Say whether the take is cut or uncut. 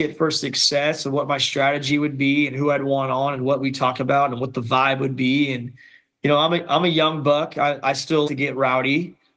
cut